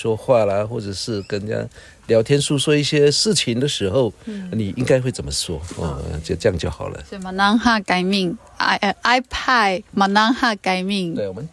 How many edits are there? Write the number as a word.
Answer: zero